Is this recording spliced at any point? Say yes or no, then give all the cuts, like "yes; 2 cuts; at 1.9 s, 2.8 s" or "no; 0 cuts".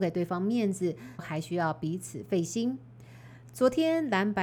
yes; 1 cut; at 1.2 s